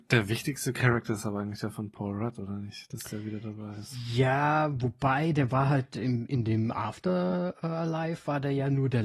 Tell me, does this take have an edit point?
no; 0 cuts

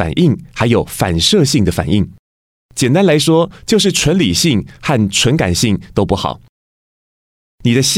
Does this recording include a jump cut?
no; 0 cuts

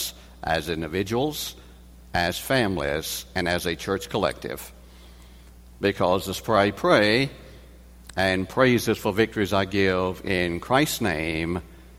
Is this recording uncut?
yes; 0 cuts

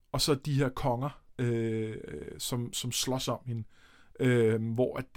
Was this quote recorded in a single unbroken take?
no; 1 cut; at 1.3 s

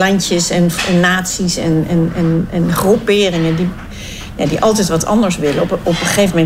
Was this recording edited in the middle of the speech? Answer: no; 0 cuts

